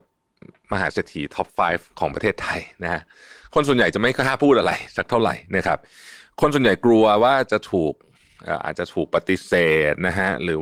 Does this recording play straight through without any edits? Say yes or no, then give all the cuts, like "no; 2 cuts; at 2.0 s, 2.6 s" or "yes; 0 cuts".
yes; 0 cuts